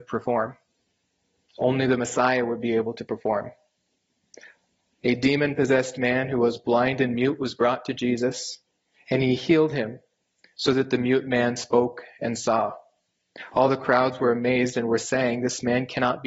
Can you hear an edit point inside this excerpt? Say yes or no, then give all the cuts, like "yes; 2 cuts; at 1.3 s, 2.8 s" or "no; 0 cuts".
no; 0 cuts